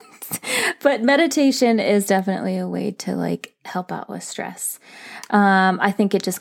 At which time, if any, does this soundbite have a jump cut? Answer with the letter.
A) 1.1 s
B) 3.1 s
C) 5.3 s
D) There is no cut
C